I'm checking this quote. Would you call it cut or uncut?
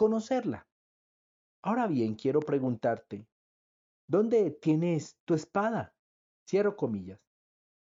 cut